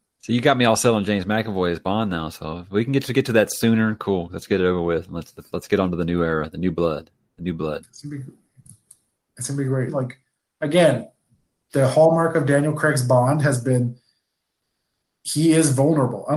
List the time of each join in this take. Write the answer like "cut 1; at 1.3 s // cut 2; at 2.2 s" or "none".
cut 1; at 9.9 s